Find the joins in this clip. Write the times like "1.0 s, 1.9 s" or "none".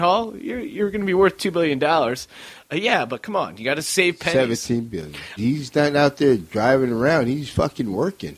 5.4 s

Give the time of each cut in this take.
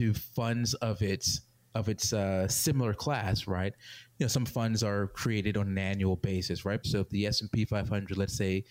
4.1 s, 6.8 s

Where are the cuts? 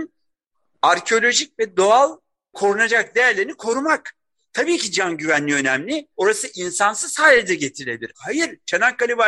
6.1 s, 8.1 s

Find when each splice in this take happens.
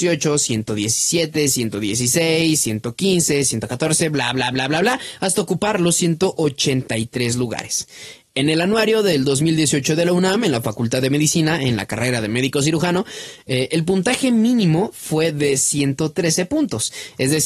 none

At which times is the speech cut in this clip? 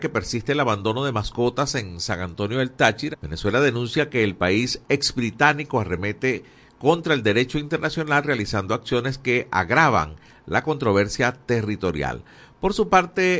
3.1 s

